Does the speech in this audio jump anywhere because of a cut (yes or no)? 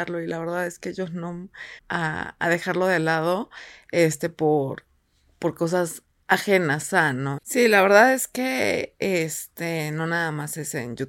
yes